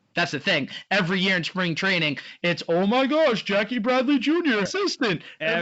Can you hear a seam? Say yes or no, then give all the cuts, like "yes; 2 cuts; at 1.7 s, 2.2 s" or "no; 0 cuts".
yes; 1 cut; at 4.7 s